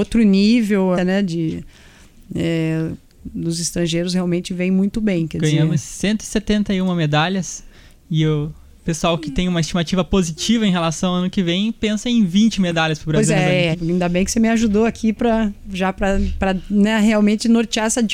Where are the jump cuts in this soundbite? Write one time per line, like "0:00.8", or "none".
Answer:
0:01.0
0:13.7

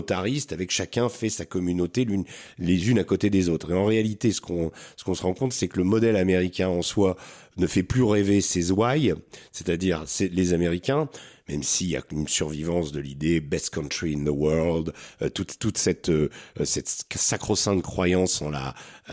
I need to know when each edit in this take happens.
none

